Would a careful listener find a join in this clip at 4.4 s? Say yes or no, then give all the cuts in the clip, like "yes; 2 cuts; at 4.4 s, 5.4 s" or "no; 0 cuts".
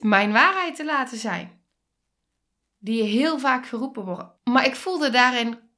yes; 2 cuts; at 2.7 s, 4.4 s